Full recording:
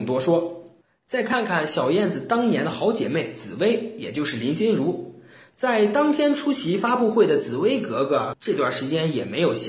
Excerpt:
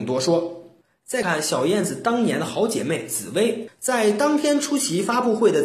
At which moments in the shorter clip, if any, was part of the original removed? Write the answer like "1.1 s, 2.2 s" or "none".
1.2 s, 3.7 s